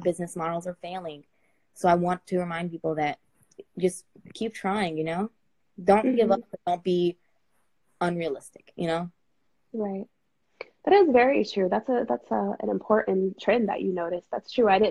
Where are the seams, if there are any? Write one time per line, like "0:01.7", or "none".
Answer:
none